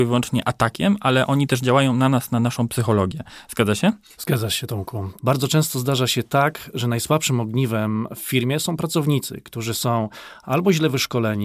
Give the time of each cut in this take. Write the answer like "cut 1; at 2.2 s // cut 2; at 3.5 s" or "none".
cut 1; at 5.2 s